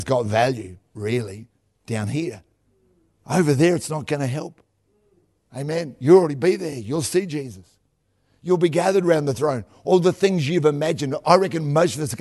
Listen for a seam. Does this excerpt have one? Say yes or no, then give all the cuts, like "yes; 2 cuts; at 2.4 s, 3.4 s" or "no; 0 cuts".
no; 0 cuts